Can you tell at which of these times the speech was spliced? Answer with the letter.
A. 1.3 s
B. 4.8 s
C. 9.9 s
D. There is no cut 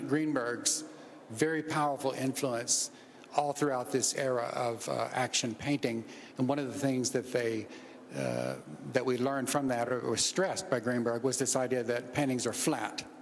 D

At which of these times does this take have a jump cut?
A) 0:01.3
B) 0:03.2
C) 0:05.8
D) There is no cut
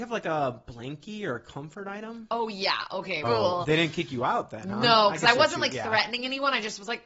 B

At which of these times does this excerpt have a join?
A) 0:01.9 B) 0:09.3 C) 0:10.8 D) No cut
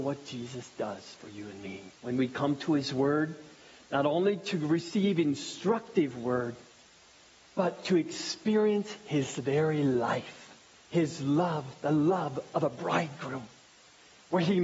A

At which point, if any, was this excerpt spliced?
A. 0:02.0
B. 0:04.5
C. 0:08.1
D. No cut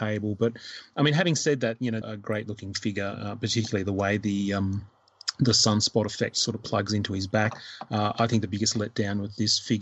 A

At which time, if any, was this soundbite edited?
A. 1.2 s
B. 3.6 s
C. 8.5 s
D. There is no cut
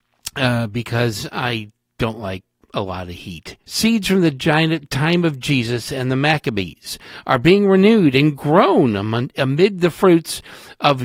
B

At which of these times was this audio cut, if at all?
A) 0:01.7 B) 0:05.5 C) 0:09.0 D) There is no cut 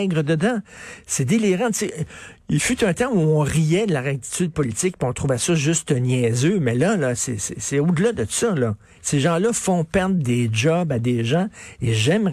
C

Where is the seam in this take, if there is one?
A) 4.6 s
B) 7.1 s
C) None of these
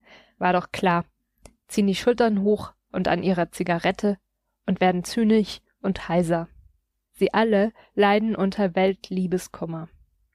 B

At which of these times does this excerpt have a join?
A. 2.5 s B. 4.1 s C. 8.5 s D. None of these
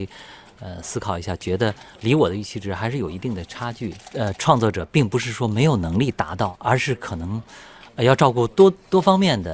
D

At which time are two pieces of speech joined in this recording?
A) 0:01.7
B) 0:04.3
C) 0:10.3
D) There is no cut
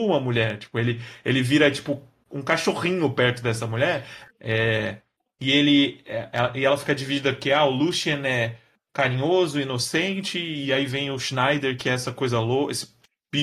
B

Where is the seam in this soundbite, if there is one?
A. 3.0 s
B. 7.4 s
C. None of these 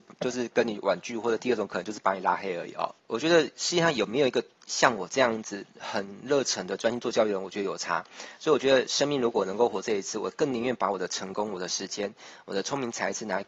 A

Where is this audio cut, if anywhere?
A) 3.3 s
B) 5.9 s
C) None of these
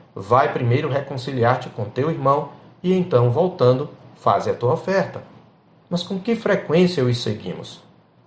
B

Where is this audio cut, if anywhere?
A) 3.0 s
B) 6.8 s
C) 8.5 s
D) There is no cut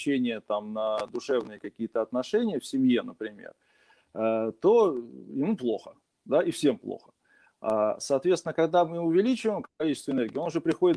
D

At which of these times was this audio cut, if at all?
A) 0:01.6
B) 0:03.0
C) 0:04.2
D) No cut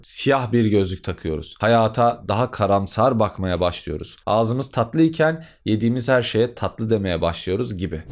C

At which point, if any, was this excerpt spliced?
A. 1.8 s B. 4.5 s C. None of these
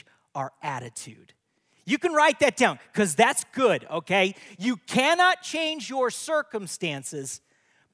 C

